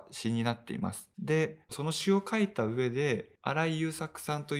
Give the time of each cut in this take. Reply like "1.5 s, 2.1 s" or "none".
1.6 s, 3.4 s